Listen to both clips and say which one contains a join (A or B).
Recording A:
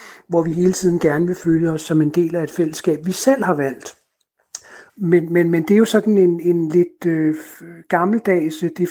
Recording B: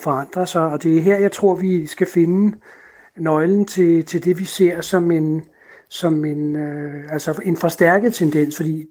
A